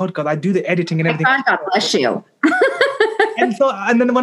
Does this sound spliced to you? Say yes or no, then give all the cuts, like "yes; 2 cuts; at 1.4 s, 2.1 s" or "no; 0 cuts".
no; 0 cuts